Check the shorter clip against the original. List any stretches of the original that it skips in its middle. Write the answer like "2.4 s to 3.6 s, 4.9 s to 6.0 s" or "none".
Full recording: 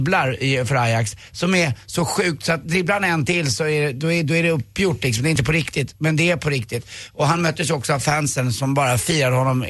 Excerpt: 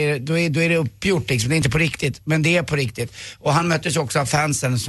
none